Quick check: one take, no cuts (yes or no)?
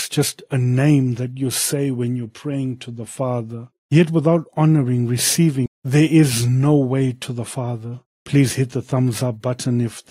no